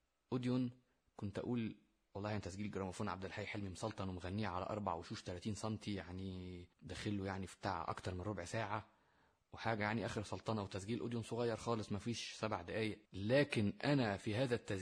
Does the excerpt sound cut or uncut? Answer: cut